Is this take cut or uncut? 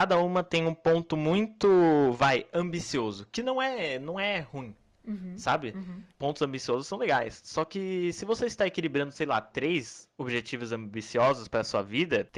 cut